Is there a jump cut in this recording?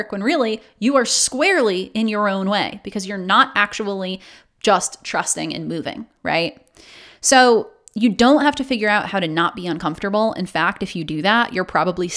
no; 0 cuts

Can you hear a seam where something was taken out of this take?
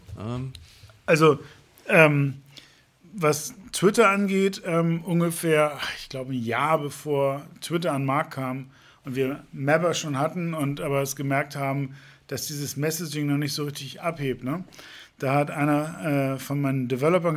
no; 0 cuts

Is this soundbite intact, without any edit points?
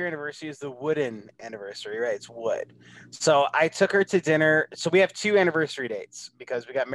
yes; 0 cuts

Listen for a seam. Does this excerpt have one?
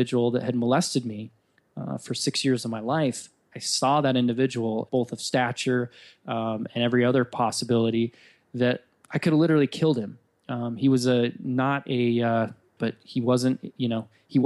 yes; 2 cuts; at 4.9 s, 12.8 s

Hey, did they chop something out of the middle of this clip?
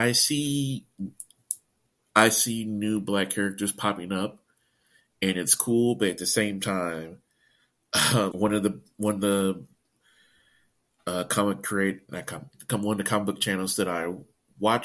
yes; 1 cut; at 8.3 s

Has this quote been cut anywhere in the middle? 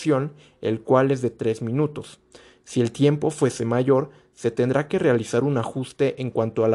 no; 0 cuts

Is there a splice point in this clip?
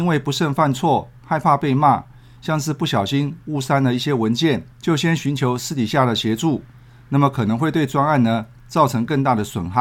yes; 1 cut; at 4.7 s

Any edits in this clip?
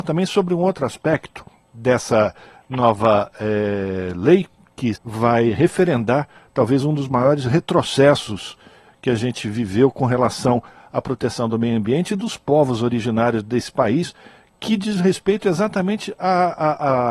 yes; 1 cut; at 5.0 s

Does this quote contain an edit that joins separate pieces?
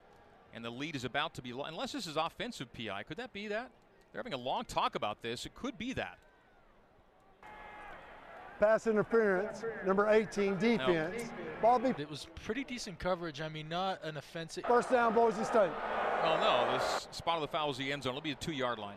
yes; 2 cuts; at 12.0 s, 14.6 s

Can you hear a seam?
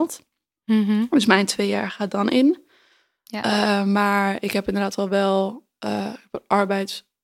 no; 0 cuts

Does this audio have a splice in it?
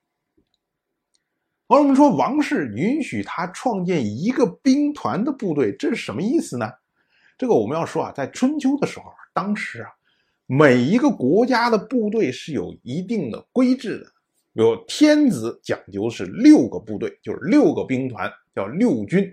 no; 0 cuts

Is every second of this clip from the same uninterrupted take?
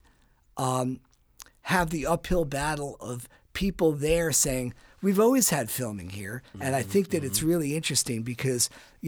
no; 1 cut; at 6.5 s

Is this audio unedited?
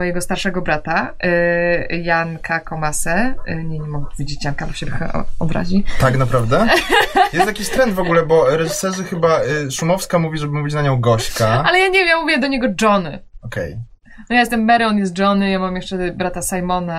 yes; 0 cuts

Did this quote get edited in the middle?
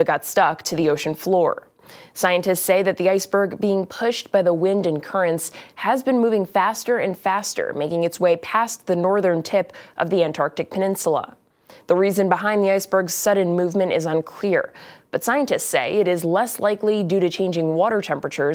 no; 0 cuts

